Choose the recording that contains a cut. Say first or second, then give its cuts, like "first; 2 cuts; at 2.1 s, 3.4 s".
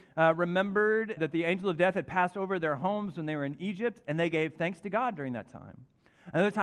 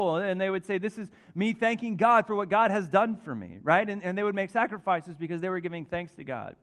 first; 1 cut; at 1.2 s